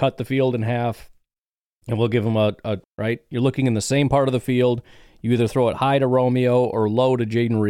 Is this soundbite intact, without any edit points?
no; 1 cut; at 2.8 s

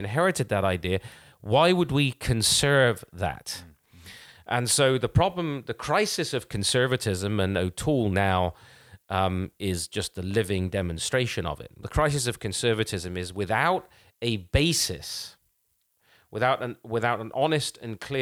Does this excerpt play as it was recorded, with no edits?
yes; 0 cuts

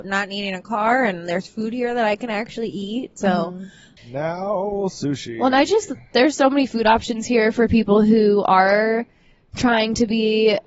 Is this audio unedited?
no; 1 cut; at 4.0 s

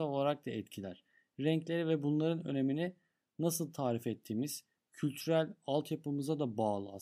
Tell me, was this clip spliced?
no; 0 cuts

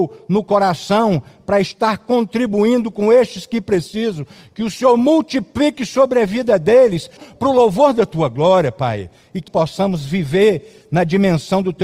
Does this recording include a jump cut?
yes; 2 cuts; at 7.2 s, 9.5 s

